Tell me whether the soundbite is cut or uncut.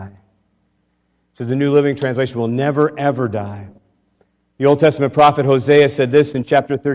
uncut